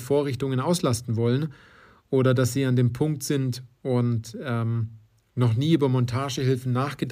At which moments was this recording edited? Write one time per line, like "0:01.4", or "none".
none